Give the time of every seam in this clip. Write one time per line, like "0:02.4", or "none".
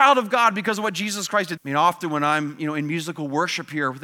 0:01.6